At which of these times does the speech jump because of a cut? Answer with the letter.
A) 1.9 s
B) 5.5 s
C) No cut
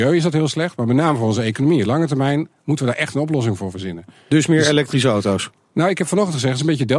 C